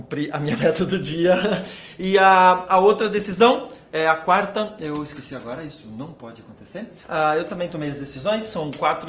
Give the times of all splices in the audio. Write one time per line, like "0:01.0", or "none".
0:07.0